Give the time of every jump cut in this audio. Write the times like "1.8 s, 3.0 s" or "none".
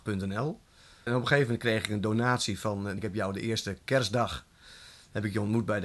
1.1 s, 3.0 s